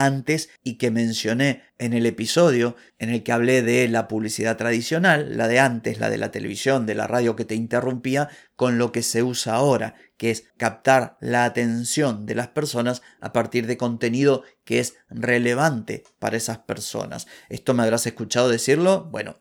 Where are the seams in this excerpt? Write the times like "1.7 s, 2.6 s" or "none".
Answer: none

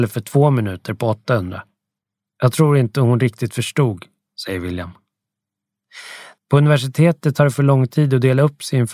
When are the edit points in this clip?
6.3 s

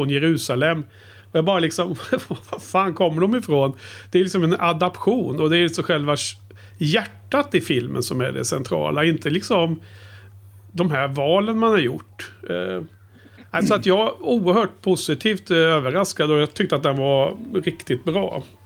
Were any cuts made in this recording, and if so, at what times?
none

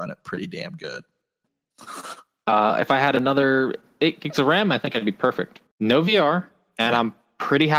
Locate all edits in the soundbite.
1.4 s, 5.7 s

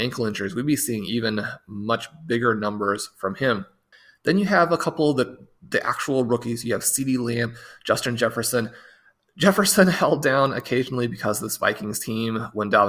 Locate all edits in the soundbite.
none

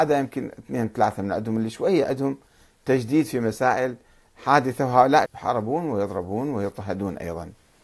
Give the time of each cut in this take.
5.3 s

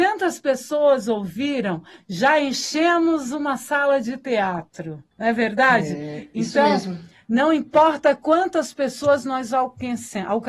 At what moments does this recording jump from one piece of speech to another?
5.1 s

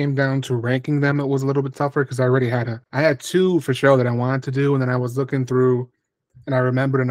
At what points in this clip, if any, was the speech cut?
2.8 s

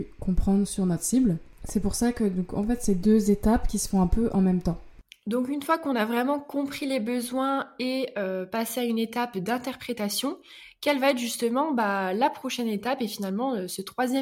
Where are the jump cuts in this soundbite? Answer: none

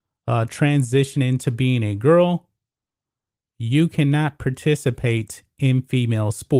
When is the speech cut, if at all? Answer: none

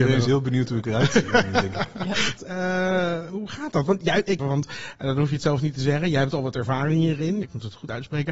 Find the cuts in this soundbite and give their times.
2.4 s, 4.4 s, 7.4 s

